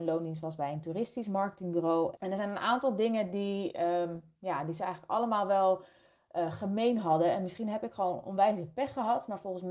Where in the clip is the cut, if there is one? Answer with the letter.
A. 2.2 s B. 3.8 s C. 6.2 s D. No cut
A